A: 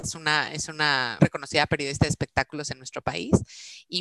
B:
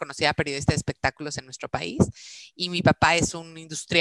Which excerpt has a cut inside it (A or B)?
A